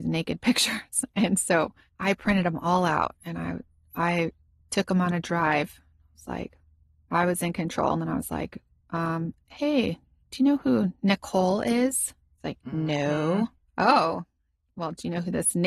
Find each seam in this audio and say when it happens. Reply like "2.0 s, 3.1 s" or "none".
13.7 s